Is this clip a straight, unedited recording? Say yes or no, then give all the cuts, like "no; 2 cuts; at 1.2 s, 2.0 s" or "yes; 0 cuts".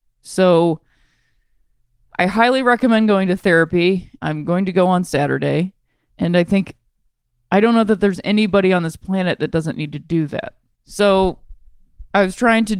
no; 3 cuts; at 4.2 s, 6.1 s, 10.8 s